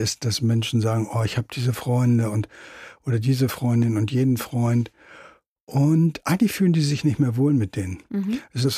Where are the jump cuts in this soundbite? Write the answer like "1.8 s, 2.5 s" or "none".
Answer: none

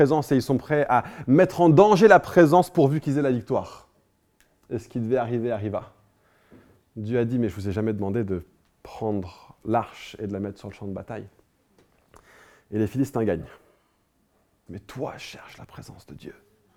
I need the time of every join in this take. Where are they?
14.7 s

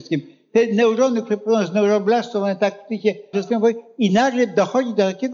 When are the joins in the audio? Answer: 3.3 s

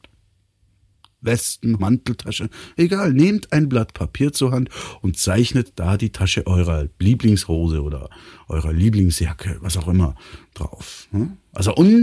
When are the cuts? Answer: 1.8 s

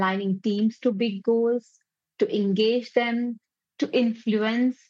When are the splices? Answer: none

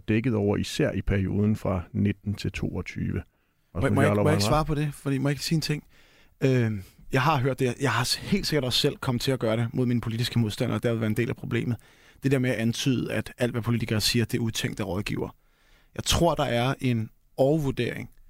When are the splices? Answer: none

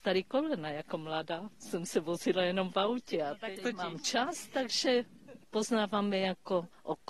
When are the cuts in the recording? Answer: 3.6 s

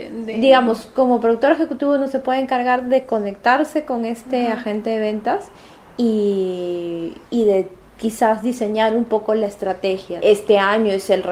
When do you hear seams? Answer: 7.3 s, 10.2 s

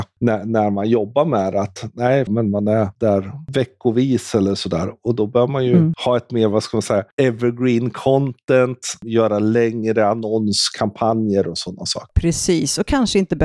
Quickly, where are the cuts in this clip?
2.3 s

